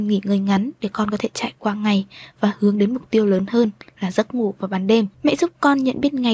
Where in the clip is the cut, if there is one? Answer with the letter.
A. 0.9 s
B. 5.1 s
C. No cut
B